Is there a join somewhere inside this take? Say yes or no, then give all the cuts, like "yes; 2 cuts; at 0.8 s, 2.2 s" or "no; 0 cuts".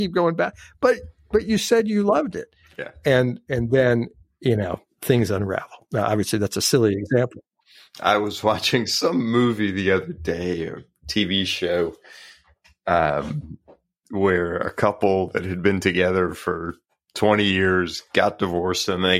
no; 0 cuts